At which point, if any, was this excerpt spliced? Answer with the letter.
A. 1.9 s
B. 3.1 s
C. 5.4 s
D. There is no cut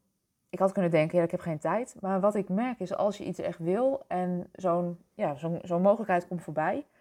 D